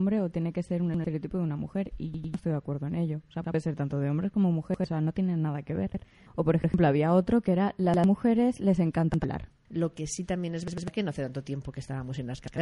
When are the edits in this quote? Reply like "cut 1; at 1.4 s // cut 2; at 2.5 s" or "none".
cut 1; at 6.3 s // cut 2; at 9.7 s